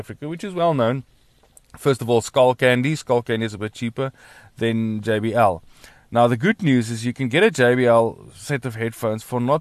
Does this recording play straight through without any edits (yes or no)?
yes